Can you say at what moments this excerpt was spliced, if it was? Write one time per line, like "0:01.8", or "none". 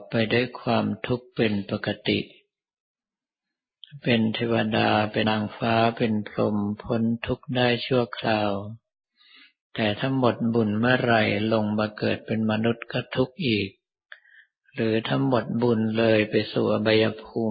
0:05.2